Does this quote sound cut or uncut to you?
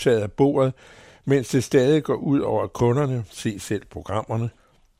uncut